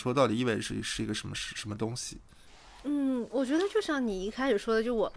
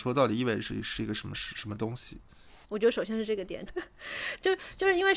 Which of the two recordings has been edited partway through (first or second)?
second